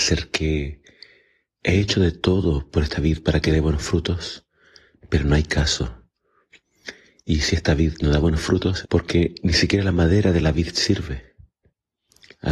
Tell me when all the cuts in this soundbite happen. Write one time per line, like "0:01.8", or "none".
0:08.8